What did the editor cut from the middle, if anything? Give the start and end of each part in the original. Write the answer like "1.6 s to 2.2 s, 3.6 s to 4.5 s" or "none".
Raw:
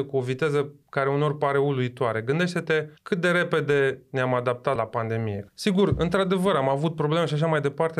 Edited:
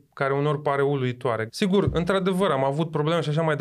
2.2 s to 5.5 s